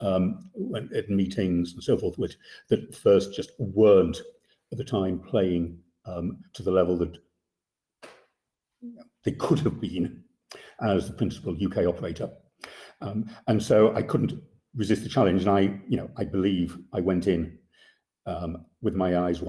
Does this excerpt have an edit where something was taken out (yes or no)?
no